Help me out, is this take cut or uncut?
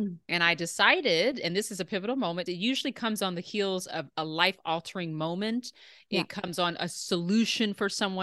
cut